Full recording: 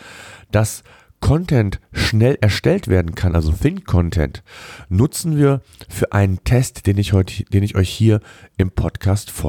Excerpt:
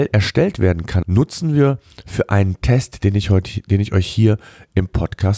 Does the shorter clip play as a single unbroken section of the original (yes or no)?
no